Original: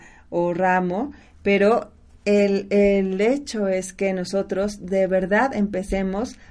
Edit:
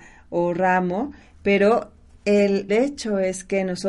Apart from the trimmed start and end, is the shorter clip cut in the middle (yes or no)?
yes